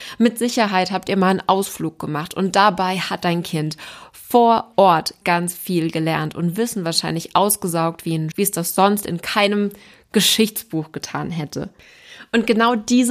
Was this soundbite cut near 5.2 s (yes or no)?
yes